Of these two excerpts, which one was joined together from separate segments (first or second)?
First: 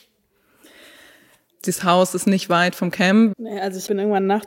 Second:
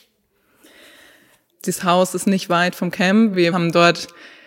first